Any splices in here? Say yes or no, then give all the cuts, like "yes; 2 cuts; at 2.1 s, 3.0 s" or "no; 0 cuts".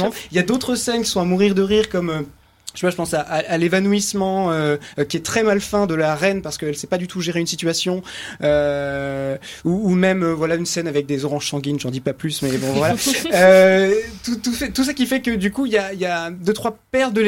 no; 0 cuts